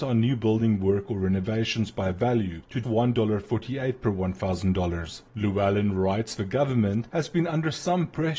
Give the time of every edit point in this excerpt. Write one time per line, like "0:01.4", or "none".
0:02.8
0:05.3